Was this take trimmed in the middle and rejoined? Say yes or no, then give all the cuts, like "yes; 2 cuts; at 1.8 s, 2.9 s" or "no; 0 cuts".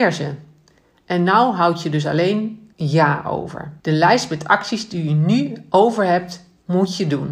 yes; 2 cuts; at 2.7 s, 3.8 s